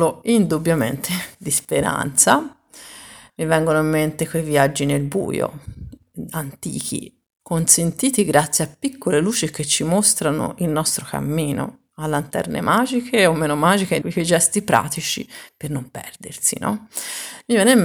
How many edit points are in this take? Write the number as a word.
two